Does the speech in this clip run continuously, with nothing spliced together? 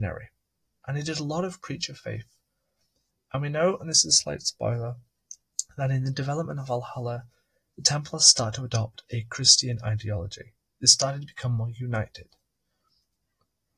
yes; 0 cuts

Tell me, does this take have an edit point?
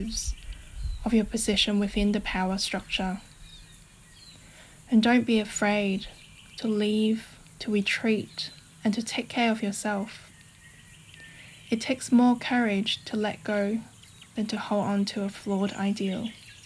no; 0 cuts

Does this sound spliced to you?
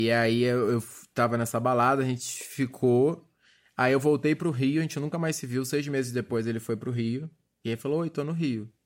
no; 0 cuts

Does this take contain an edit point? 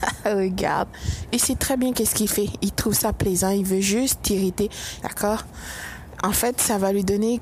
yes; 1 cut; at 5.0 s

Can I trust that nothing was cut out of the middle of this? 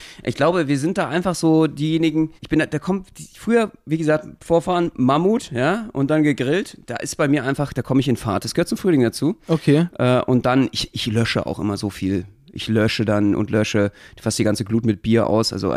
no; 1 cut; at 2.4 s

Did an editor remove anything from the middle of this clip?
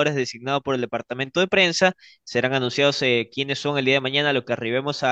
no; 0 cuts

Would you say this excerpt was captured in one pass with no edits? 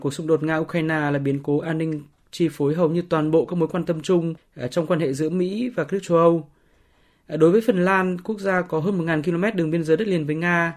yes; 0 cuts

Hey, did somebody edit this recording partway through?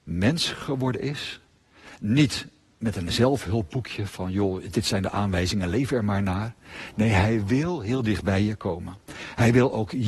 no; 0 cuts

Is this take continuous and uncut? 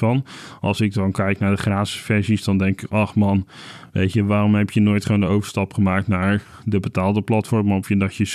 yes; 0 cuts

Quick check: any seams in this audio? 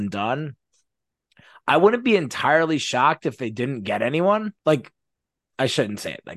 yes; 1 cut; at 4.6 s

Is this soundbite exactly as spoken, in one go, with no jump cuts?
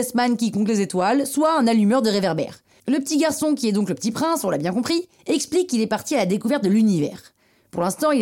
no; 1 cut; at 2.8 s

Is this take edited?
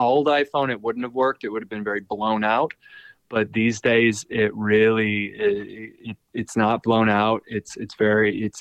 no; 0 cuts

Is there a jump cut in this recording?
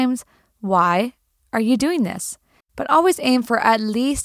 yes; 1 cut; at 2.6 s

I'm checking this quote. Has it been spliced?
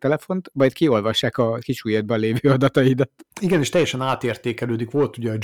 yes; 1 cut; at 3.3 s

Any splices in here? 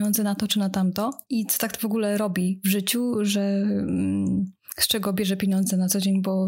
no; 0 cuts

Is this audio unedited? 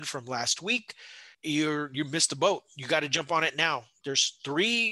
no; 2 cuts; at 1.3 s, 4.0 s

